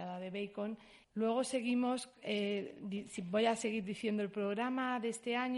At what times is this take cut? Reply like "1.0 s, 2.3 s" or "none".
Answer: 1.0 s